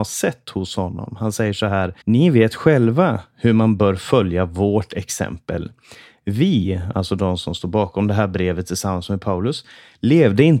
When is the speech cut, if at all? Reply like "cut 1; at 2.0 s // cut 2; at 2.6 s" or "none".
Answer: cut 1; at 2.0 s

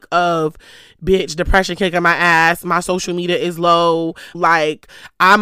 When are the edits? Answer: cut 1; at 4.3 s

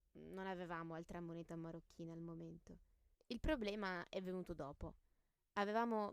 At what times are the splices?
cut 1; at 3.2 s

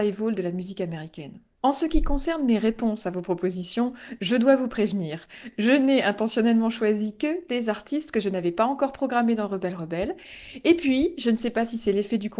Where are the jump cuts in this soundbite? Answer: none

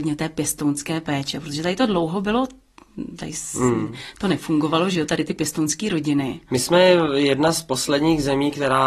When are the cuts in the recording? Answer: none

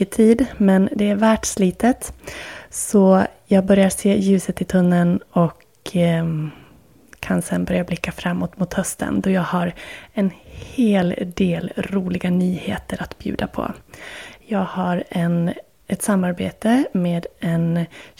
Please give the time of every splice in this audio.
none

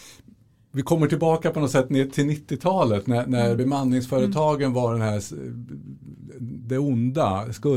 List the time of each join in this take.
none

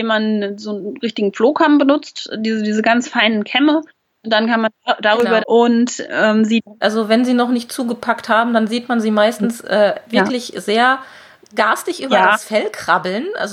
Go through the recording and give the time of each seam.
cut 1; at 5.4 s // cut 2; at 6.8 s

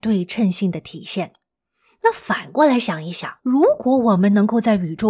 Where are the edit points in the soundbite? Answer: cut 1; at 3.4 s

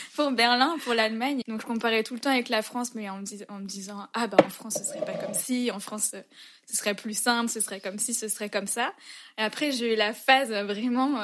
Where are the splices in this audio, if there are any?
cut 1; at 1.4 s

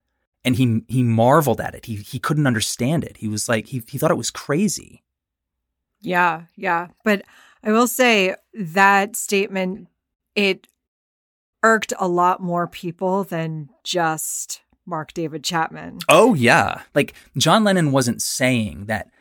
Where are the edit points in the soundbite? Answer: cut 1; at 16.8 s

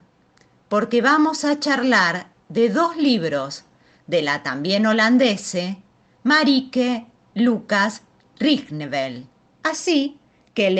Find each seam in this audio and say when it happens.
cut 1; at 9.5 s

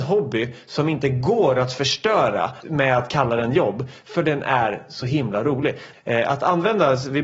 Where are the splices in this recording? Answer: cut 1; at 2.6 s // cut 2; at 5.9 s

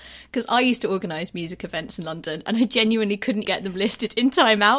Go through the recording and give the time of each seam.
cut 1; at 3.4 s

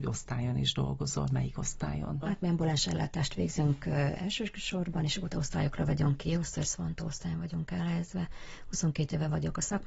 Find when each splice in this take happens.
cut 1; at 2.2 s // cut 2; at 6.6 s

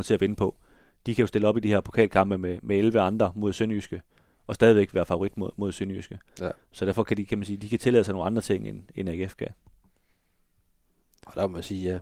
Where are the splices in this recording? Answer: none

